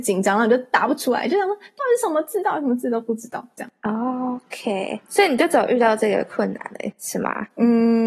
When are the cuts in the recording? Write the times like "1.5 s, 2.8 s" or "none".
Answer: none